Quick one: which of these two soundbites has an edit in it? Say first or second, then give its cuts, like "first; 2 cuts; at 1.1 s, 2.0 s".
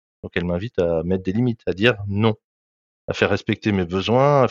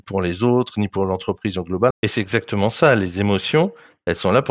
second; 1 cut; at 1.9 s